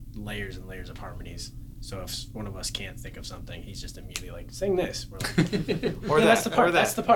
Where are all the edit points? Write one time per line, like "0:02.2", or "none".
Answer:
none